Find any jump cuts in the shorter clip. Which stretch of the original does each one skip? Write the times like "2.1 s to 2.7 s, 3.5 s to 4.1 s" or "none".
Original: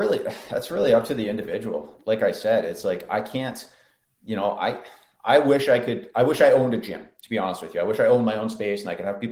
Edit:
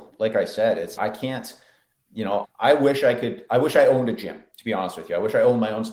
2.8 s to 3.1 s, 4.5 s to 5.1 s